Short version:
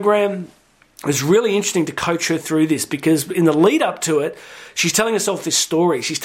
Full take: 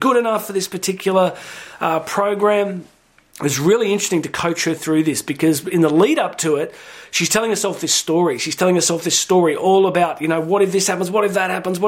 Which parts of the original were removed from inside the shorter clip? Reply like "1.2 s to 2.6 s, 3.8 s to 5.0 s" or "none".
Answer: none